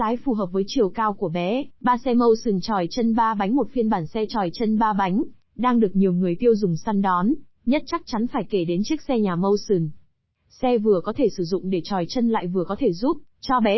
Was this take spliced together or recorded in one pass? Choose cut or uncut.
cut